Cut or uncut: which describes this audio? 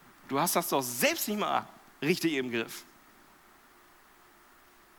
uncut